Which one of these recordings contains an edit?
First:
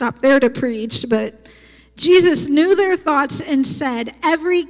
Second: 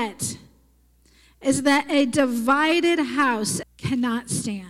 second; 1 cut; at 3.6 s

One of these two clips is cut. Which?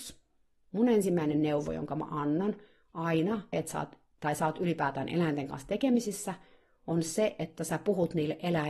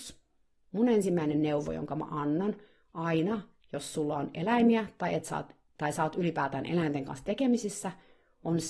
first; 1 cut; at 3.5 s

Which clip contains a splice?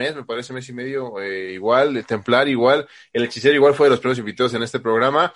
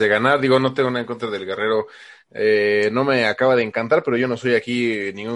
second; 1 cut; at 2.2 s

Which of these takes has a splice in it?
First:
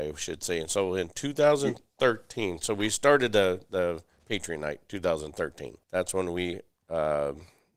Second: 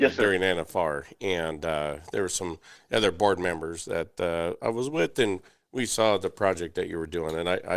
first; 1 cut; at 5.8 s

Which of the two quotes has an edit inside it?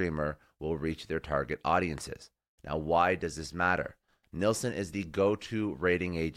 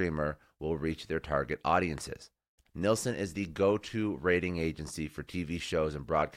second; 1 cut; at 2.6 s

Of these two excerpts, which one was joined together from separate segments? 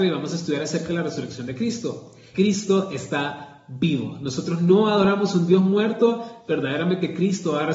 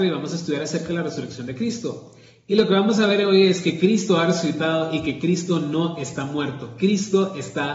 first; 1 cut; at 2.3 s

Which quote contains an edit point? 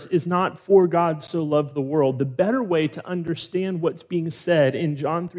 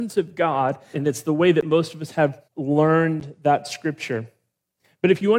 second; 2 cuts; at 0.9 s, 2.5 s

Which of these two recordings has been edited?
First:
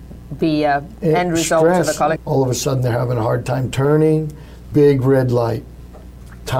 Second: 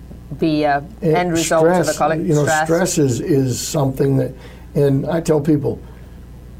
first; 2 cuts; at 2.2 s, 4.7 s

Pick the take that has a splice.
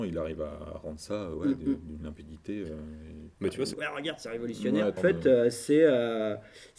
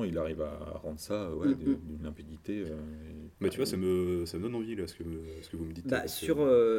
first; 2 cuts; at 3.7 s, 5.0 s

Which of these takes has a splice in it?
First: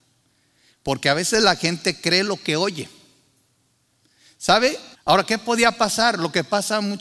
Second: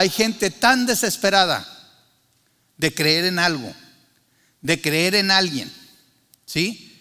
first; 1 cut; at 4.9 s

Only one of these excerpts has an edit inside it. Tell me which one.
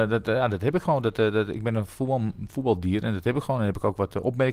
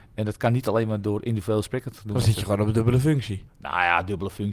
second; 1 cut; at 3.5 s

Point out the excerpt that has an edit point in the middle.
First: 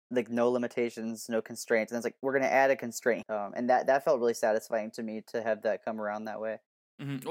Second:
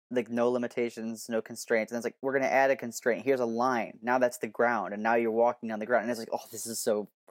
first; 1 cut; at 3.2 s

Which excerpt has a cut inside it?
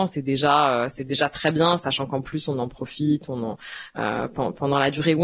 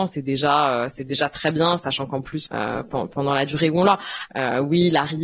second; 2 cuts; at 2.5 s, 4.3 s

